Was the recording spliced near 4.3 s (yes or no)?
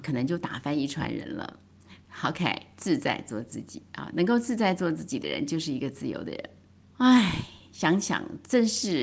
no